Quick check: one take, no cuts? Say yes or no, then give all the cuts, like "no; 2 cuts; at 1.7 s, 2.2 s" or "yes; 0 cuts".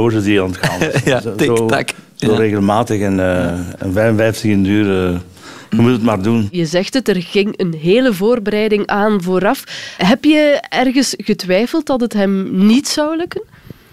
yes; 0 cuts